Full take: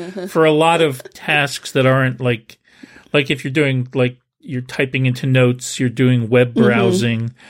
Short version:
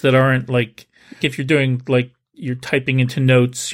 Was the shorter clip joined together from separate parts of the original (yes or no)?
yes